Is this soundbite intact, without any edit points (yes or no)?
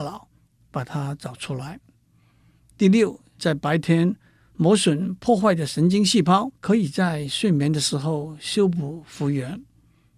no